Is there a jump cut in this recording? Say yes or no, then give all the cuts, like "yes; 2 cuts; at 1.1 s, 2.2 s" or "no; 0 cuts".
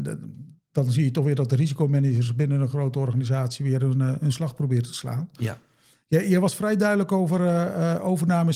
no; 0 cuts